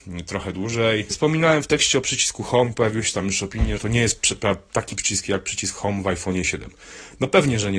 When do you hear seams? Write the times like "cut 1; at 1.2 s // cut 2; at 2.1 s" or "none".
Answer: cut 1; at 1.1 s // cut 2; at 3.8 s

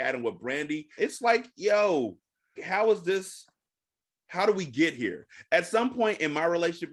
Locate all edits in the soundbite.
cut 1; at 1.0 s // cut 2; at 2.6 s

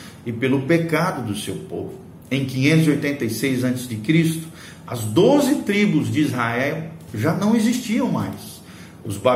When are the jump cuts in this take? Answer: none

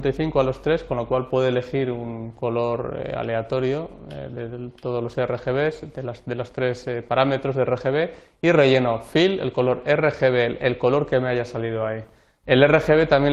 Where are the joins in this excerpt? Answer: cut 1; at 12.4 s

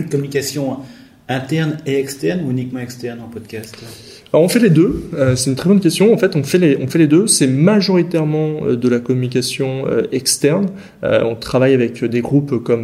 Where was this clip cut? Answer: none

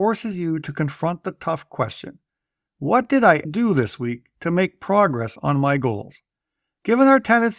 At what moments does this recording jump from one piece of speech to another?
cut 1; at 3.4 s

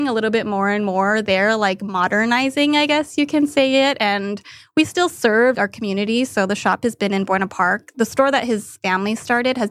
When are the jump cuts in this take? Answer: cut 1; at 5.5 s // cut 2; at 7.9 s

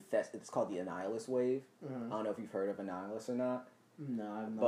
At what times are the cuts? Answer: none

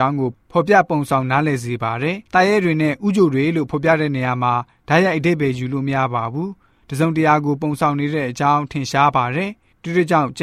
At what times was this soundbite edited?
cut 1; at 2.3 s

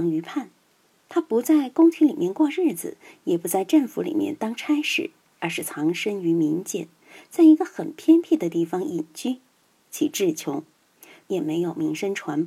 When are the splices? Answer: cut 1; at 9.8 s // cut 2; at 11.2 s

